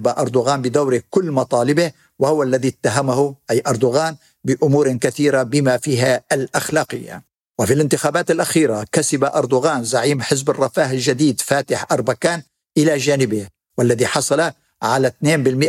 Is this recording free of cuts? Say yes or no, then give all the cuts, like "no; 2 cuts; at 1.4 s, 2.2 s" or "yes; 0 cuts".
yes; 0 cuts